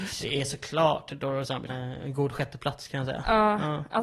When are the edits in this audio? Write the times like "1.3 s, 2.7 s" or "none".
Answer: 1.7 s